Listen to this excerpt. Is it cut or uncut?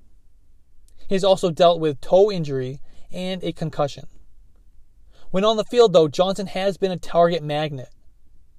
uncut